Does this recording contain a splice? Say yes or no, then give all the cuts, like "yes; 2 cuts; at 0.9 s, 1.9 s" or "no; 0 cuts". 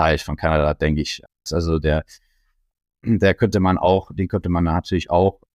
yes; 1 cut; at 1.5 s